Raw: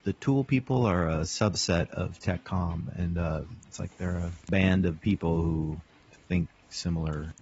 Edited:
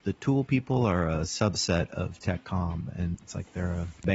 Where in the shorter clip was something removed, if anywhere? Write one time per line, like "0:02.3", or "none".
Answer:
0:03.1